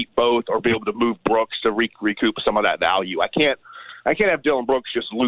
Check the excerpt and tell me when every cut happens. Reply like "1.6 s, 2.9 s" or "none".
none